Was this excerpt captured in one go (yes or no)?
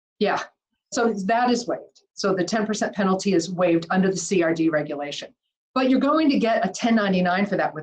yes